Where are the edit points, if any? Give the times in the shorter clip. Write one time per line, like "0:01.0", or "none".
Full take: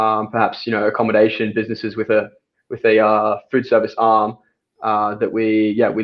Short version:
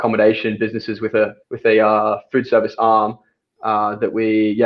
0:01.4